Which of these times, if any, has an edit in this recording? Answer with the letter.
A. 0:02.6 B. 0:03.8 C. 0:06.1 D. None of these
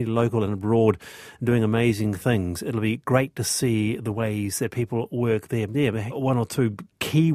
C